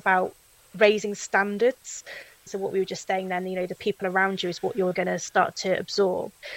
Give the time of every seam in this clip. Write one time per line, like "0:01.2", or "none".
0:02.5
0:04.9